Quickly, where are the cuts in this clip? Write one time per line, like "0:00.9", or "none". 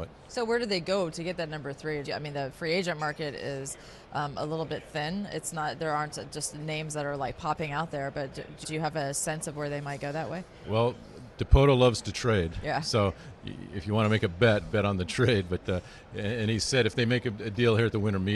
0:02.0
0:08.6